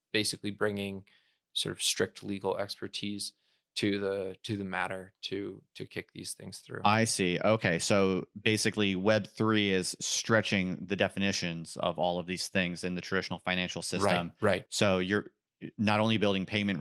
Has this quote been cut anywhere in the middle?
no; 0 cuts

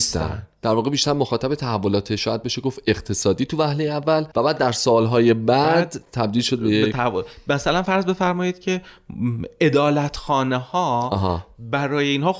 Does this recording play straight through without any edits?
no; 1 cut; at 4.3 s

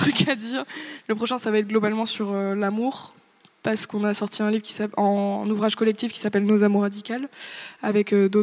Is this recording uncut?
yes; 0 cuts

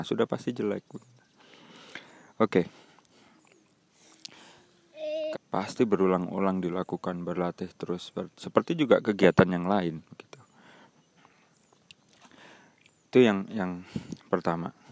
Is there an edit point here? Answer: yes; 2 cuts; at 3.1 s, 5.3 s

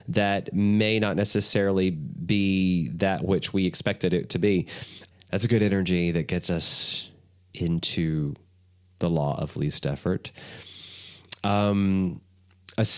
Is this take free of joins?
no; 1 cut; at 5.1 s

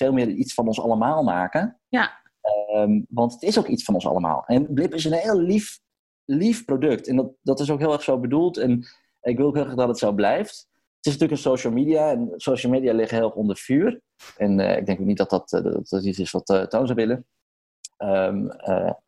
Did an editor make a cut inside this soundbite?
yes; 2 cuts; at 14.4 s, 17.9 s

